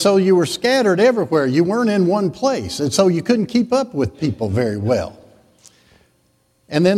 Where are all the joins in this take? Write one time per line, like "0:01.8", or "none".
none